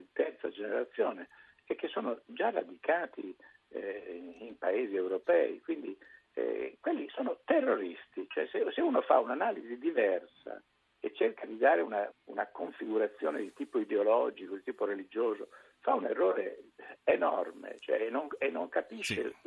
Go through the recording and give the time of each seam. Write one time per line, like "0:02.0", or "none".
0:12.1